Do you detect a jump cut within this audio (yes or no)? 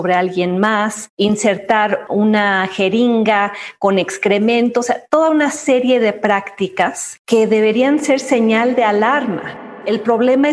no